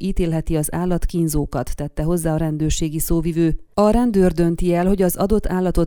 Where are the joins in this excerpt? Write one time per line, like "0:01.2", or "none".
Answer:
0:03.7

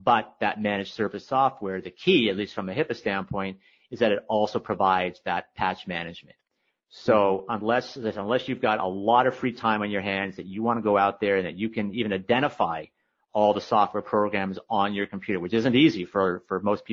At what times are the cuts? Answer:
none

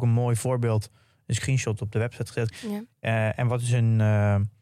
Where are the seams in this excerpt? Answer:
0:02.5

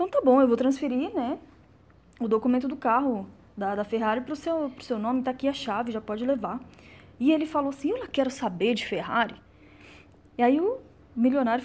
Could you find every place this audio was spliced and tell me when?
none

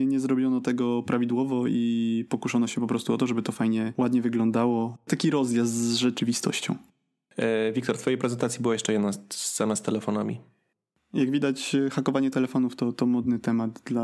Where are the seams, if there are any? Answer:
none

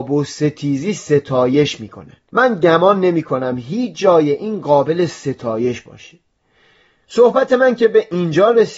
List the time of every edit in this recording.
0:02.3

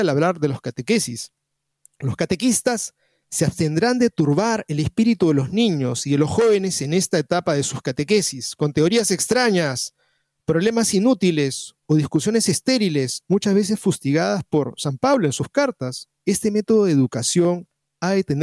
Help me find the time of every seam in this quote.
0:16.2

